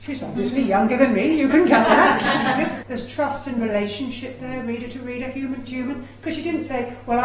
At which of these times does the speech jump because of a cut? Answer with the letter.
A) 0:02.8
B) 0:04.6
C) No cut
A